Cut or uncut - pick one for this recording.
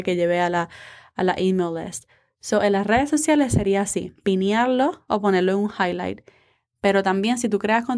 uncut